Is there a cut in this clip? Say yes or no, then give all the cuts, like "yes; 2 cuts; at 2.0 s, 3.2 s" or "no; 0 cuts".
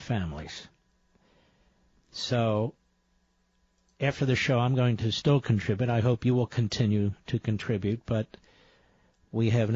no; 0 cuts